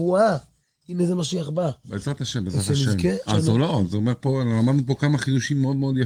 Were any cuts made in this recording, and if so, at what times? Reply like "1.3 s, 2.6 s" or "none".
3.3 s